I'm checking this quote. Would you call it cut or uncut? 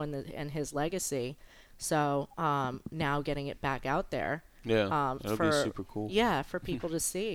uncut